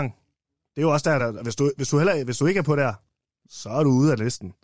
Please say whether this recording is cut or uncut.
uncut